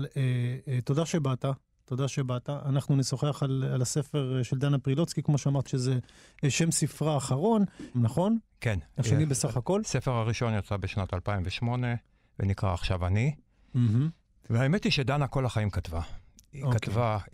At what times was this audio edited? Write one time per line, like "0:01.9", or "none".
0:05.7
0:07.9